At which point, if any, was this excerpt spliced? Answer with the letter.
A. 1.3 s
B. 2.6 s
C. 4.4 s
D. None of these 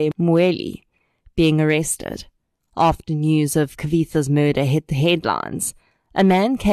B